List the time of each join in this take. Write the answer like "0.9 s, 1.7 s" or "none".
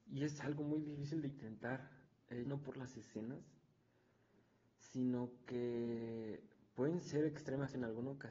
2.4 s